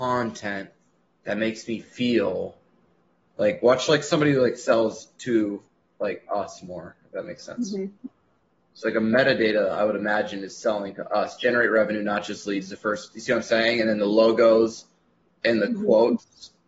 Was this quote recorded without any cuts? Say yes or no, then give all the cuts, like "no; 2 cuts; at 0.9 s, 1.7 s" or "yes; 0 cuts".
yes; 0 cuts